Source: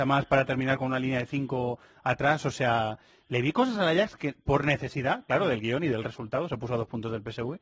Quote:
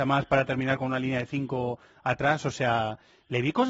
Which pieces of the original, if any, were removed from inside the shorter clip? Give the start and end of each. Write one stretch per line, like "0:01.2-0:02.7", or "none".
none